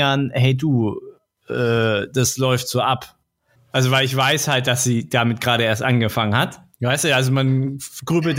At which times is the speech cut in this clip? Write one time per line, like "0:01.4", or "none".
0:03.6
0:06.7